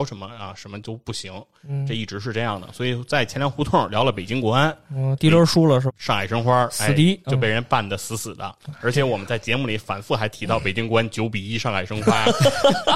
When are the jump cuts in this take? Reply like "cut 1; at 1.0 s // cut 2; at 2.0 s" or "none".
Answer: cut 1; at 5.9 s